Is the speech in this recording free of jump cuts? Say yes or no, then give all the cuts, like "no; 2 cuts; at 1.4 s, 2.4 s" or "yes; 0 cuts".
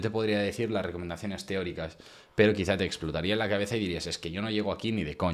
yes; 0 cuts